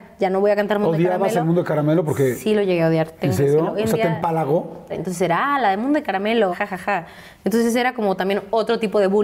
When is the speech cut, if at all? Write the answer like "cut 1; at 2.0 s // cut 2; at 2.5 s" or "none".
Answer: cut 1; at 4.9 s // cut 2; at 6.5 s